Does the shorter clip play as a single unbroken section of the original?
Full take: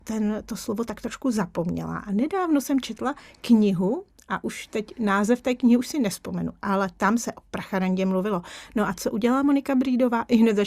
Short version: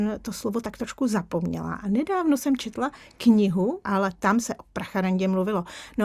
no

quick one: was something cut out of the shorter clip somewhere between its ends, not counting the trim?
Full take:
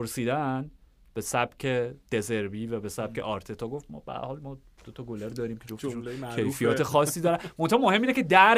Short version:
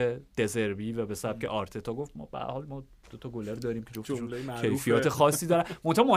no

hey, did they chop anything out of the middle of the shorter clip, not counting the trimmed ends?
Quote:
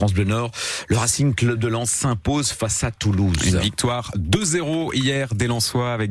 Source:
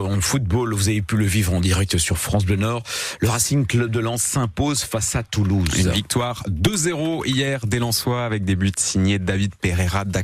no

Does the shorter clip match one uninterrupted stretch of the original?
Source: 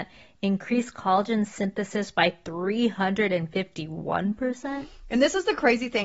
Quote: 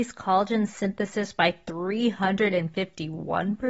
yes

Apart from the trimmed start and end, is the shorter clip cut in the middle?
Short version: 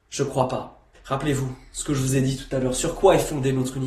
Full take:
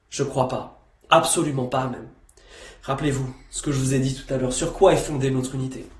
yes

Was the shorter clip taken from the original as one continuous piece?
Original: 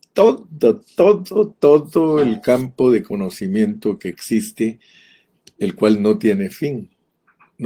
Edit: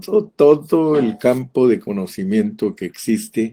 yes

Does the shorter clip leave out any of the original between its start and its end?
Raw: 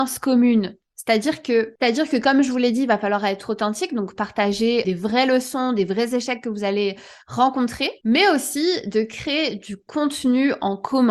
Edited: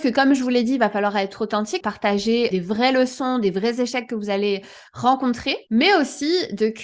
yes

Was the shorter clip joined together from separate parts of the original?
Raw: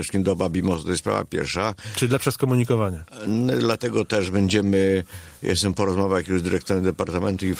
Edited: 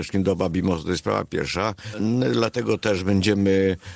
yes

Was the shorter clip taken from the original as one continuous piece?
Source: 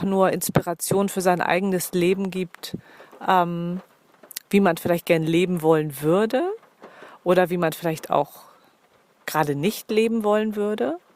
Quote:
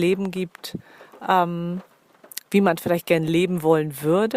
yes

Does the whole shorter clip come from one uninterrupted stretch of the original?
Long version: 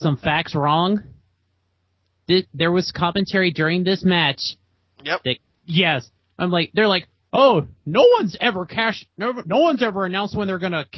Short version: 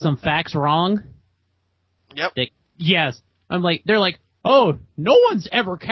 no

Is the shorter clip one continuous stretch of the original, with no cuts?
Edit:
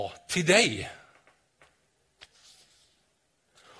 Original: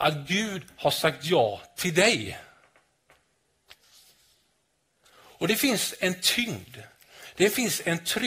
yes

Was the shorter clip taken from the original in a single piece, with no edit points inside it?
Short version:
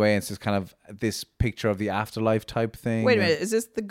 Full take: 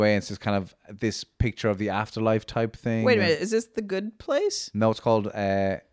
yes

